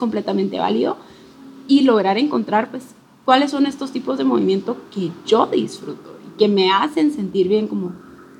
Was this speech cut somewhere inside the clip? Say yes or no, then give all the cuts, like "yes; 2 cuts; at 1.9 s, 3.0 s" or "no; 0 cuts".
no; 0 cuts